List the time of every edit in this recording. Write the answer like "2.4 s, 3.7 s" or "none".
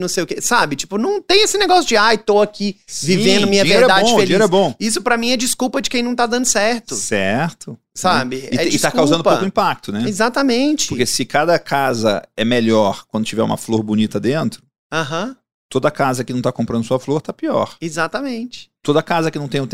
none